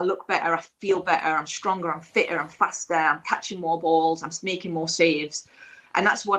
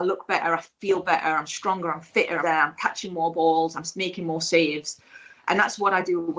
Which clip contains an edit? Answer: second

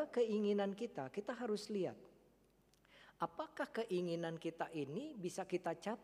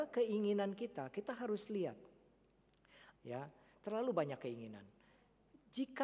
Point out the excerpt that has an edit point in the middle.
second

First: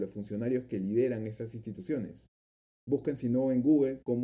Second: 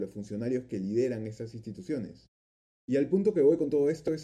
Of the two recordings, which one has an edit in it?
first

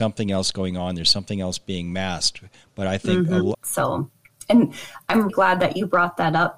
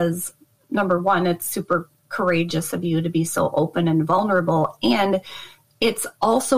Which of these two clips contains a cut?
first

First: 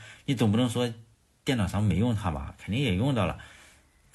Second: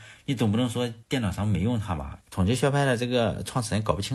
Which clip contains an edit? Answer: second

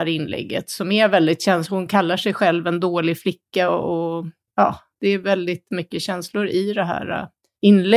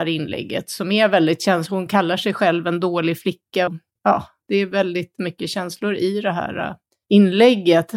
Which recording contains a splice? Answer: second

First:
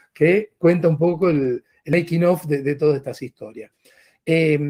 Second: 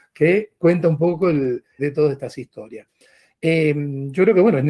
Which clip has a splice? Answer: second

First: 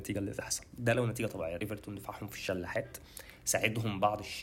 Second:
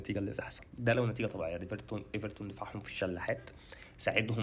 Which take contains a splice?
first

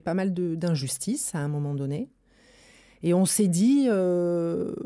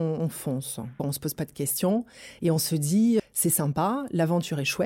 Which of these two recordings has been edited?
second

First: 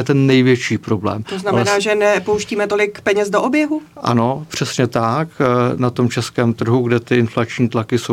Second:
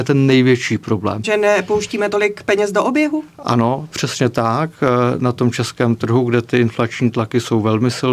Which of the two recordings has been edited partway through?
second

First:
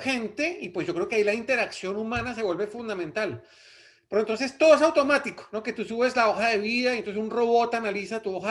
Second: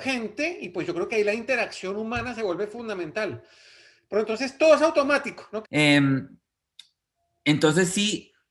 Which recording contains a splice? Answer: second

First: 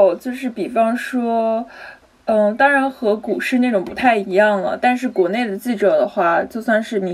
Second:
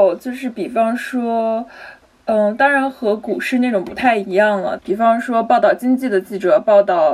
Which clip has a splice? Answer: second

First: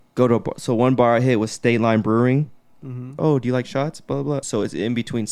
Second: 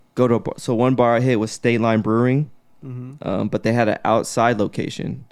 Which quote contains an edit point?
first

